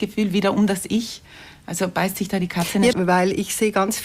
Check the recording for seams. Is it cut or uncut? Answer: cut